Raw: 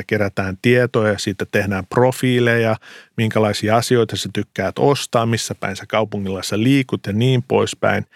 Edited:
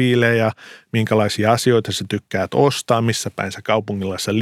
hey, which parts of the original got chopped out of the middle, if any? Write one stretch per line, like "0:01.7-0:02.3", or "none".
none